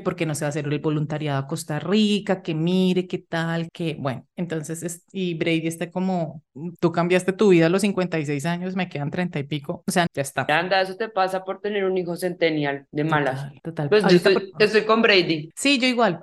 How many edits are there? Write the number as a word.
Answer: three